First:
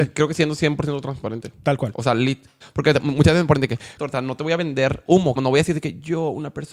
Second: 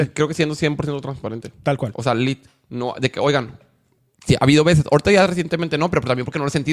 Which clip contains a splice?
first; 3 cuts; at 2.6 s, 4.0 s, 5.4 s

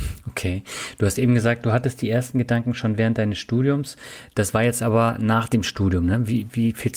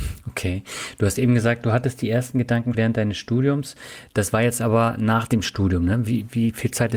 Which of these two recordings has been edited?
second; 1 cut; at 2.7 s

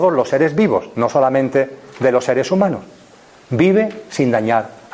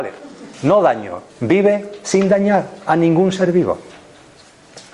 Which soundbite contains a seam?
second; 1 cut; at 1.3 s

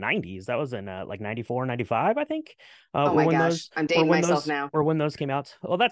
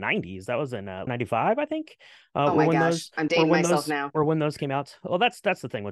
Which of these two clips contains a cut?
second; 1 cut; at 1.1 s

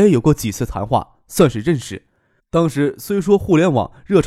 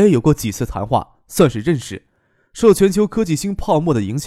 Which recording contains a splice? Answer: first; 1 cut; at 2.4 s

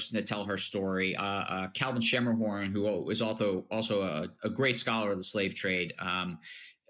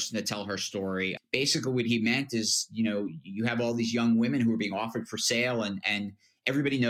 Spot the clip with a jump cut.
second; 1 cut; at 1.2 s

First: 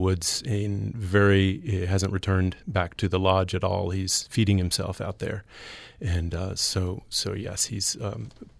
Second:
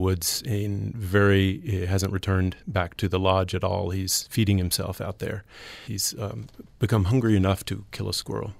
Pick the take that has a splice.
second; 1 cut; at 5.8 s

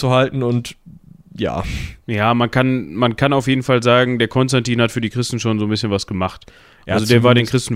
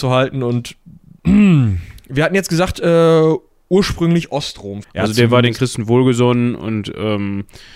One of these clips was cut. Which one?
second; 2 cuts; at 1.2 s, 4.8 s

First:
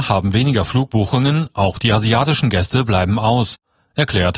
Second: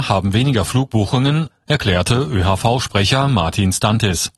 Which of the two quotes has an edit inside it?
second; 1 cut; at 1.5 s

